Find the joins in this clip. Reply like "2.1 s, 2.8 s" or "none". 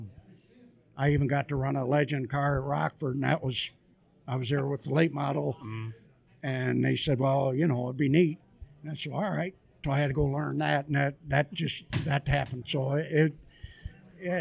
9.8 s, 12.6 s